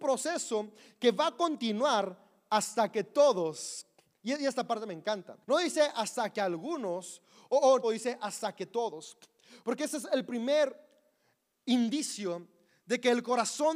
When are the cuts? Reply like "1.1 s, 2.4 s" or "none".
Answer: 5.4 s, 7.8 s